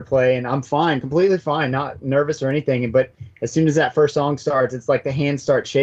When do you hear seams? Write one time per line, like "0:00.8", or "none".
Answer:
none